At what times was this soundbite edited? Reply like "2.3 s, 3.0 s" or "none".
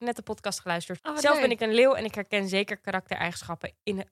1.0 s